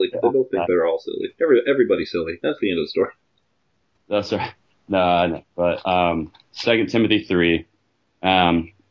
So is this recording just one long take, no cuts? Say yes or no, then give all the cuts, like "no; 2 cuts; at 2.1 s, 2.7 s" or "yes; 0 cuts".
yes; 0 cuts